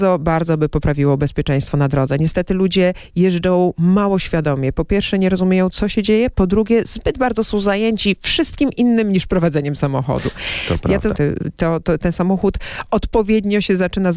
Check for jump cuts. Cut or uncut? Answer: cut